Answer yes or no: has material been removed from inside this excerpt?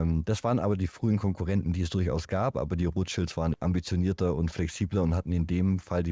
yes